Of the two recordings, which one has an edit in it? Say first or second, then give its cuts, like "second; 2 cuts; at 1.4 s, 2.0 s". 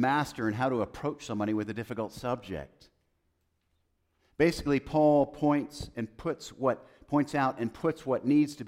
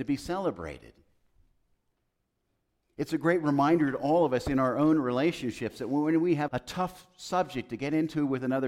second; 1 cut; at 6.5 s